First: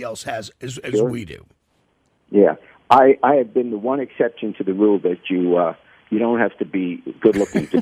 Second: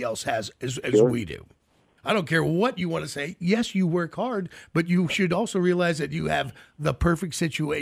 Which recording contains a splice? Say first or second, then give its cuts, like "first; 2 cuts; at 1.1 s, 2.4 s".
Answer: second; 1 cut; at 2.0 s